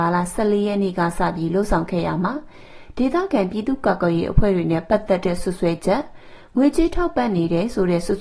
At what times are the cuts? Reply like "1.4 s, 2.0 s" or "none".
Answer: none